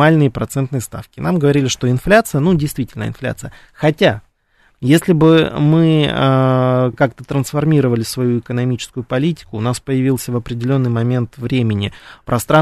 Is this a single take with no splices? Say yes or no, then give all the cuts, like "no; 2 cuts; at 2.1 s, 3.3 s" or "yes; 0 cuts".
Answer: yes; 0 cuts